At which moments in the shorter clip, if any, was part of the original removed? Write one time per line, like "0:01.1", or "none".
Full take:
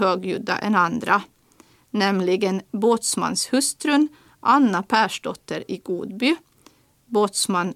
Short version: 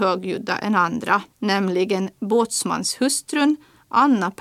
0:01.3